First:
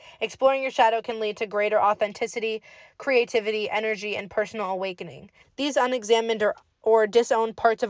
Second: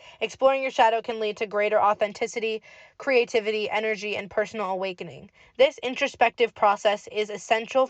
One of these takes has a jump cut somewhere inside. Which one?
first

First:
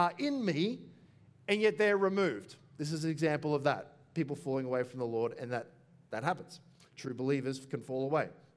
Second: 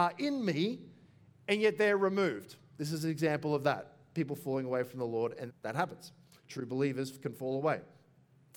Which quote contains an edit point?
second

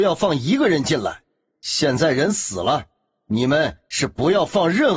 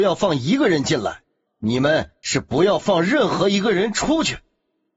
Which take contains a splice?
second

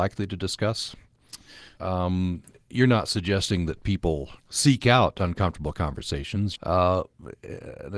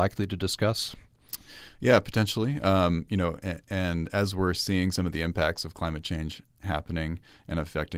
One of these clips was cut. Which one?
first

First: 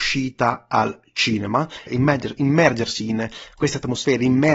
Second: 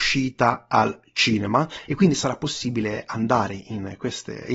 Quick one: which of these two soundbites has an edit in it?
first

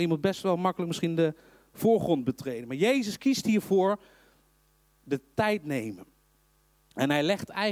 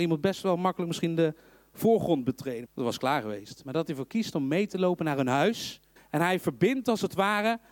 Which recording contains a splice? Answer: second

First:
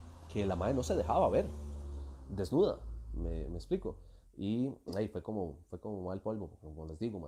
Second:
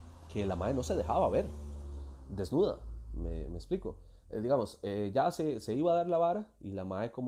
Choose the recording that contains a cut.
first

